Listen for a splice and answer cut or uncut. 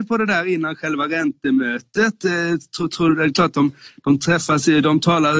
uncut